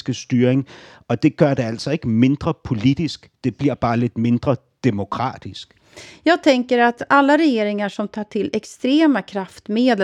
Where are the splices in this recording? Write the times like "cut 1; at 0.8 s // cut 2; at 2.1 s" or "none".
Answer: none